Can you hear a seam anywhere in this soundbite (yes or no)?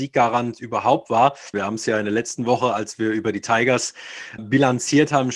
yes